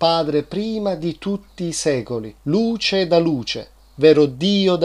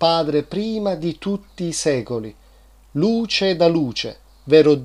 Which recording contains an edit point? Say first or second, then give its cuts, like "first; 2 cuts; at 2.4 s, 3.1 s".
first; 1 cut; at 2.4 s